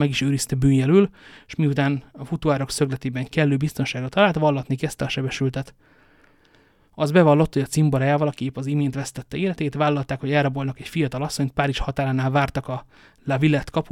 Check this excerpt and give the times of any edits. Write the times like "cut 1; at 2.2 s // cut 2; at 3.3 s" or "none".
none